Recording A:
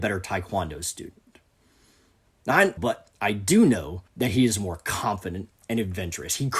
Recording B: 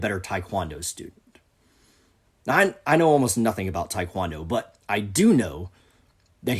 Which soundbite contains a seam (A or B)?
A